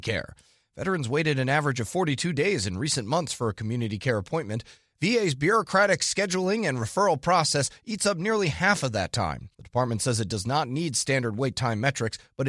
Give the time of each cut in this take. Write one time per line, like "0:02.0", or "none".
0:09.5